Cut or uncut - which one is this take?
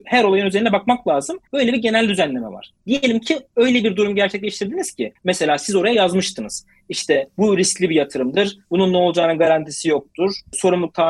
uncut